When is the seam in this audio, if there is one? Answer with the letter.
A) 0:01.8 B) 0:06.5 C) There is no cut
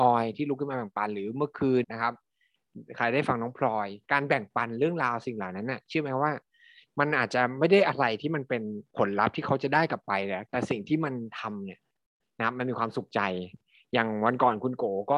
A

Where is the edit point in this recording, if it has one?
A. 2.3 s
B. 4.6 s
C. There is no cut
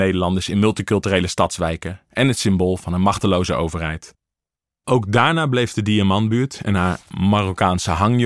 B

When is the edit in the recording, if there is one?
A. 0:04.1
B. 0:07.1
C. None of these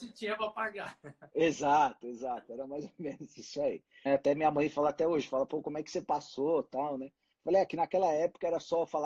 A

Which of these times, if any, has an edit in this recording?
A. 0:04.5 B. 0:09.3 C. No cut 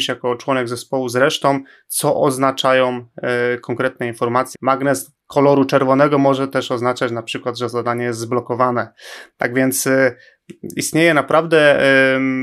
A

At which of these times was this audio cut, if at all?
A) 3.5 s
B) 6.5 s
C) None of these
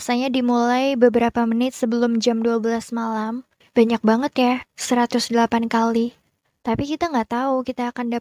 B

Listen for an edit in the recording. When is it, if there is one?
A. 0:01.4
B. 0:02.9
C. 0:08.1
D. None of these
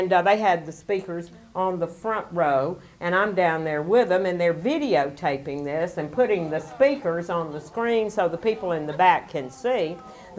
D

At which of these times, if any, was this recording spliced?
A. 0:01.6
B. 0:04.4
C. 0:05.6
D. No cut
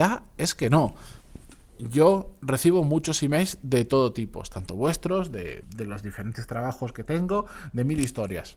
C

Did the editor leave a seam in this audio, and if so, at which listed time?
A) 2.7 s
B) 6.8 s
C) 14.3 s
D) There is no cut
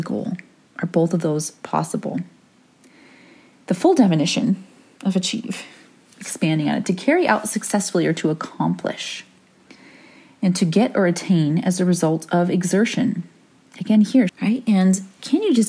C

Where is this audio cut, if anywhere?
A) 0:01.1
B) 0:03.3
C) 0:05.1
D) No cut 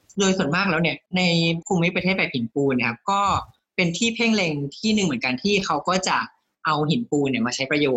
A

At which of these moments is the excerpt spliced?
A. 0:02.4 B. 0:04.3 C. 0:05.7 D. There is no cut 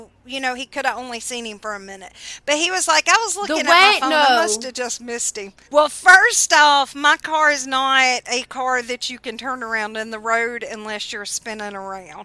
C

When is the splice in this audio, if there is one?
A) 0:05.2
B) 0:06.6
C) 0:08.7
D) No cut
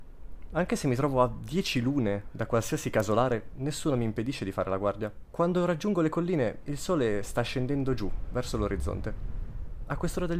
A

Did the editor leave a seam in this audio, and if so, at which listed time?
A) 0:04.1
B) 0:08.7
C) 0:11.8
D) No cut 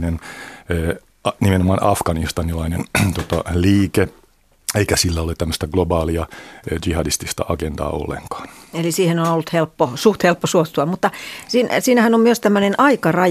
D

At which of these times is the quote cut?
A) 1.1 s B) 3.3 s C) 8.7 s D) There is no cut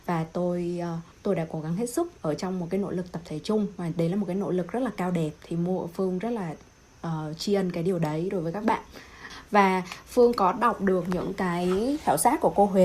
A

